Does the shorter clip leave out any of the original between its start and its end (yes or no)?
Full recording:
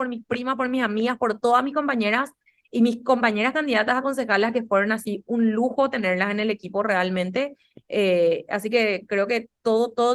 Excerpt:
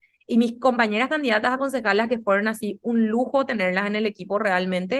no